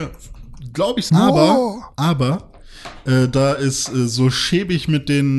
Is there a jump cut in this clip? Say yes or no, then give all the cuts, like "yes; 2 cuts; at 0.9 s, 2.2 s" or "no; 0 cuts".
yes; 1 cut; at 1.1 s